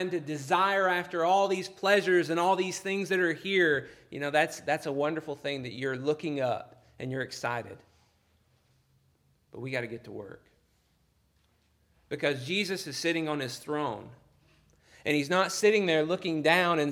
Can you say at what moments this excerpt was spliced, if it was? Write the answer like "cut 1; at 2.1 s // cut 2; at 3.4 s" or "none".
none